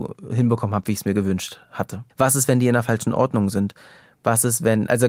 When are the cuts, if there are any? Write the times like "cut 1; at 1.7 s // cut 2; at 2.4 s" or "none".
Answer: cut 1; at 2.1 s